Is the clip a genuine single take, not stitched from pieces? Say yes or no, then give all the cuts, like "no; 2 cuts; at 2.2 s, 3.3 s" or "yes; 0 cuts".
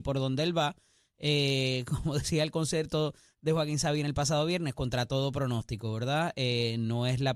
yes; 0 cuts